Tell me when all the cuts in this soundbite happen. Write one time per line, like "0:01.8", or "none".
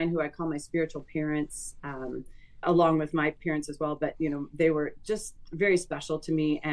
0:02.6